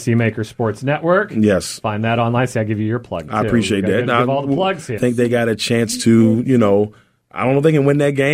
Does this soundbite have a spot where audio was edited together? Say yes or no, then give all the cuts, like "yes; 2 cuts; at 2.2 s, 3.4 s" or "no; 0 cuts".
yes; 1 cut; at 5.0 s